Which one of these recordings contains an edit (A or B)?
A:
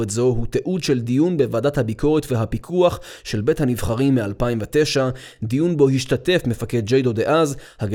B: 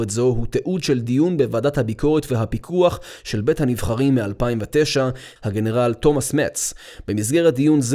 B